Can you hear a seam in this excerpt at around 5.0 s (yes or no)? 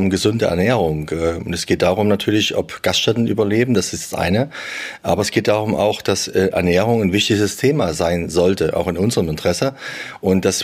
no